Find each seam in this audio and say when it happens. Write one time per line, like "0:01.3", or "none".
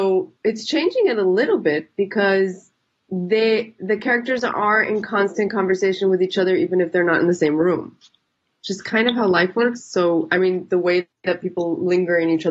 none